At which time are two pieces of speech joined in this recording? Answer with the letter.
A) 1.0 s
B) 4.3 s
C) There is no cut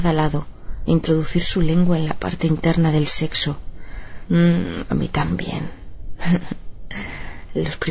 B